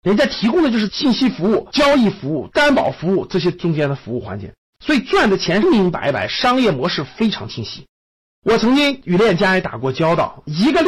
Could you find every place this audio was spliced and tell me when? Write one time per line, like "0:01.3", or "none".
0:05.6